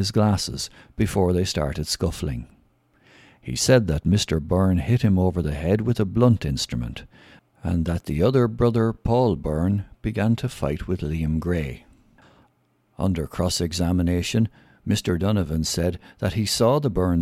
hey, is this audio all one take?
yes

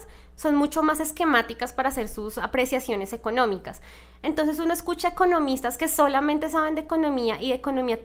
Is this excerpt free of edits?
yes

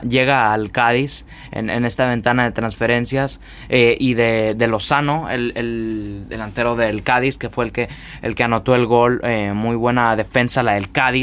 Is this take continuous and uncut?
yes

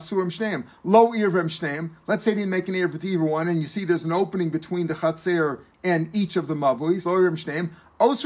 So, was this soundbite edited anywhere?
no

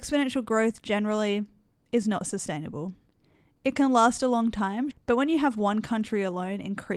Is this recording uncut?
no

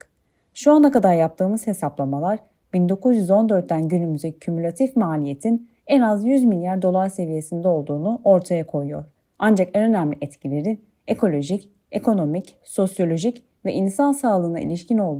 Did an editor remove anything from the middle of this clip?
yes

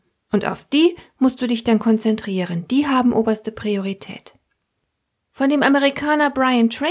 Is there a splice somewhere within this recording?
no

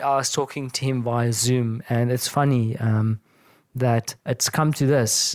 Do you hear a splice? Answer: yes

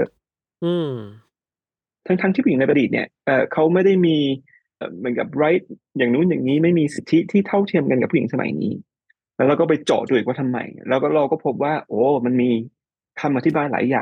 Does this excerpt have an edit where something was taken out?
yes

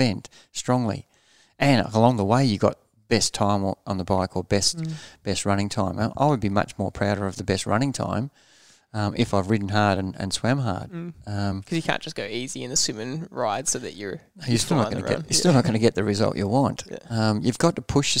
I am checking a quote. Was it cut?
no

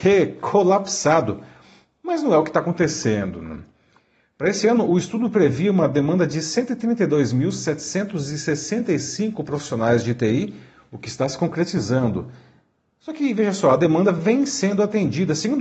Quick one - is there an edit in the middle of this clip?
no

